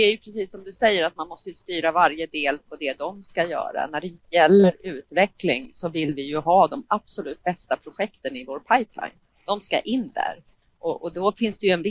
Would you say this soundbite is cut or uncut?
uncut